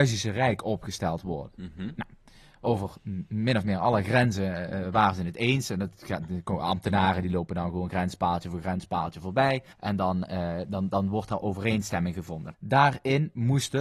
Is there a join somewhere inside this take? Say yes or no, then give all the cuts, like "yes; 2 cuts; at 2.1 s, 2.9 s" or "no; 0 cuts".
yes; 2 cuts; at 9.7 s, 12.5 s